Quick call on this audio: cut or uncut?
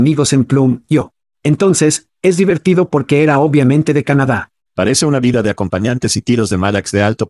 cut